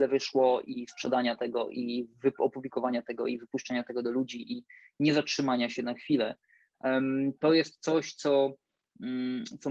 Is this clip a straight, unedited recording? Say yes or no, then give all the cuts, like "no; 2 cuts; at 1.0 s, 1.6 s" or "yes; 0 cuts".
yes; 0 cuts